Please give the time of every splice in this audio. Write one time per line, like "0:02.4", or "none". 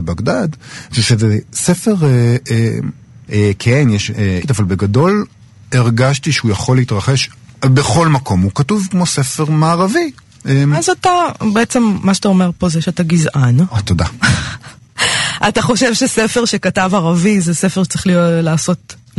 0:03.3
0:04.4